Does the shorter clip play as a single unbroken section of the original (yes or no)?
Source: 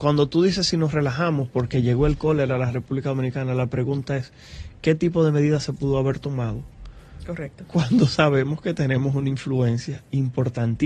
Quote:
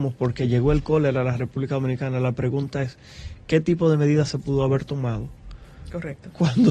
yes